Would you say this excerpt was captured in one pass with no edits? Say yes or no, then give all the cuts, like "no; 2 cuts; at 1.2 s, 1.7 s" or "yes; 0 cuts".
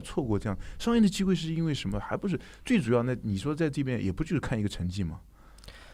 yes; 0 cuts